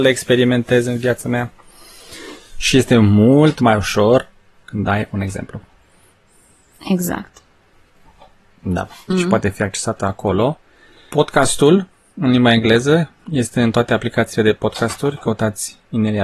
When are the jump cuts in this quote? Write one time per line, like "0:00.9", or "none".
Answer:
0:09.1
0:13.2